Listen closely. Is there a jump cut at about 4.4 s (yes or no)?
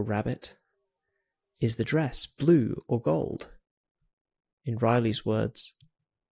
yes